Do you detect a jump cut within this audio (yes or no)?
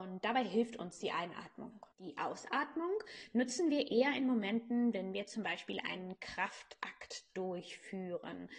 yes